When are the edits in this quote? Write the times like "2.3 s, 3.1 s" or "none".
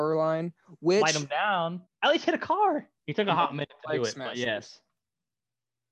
1.9 s, 3.0 s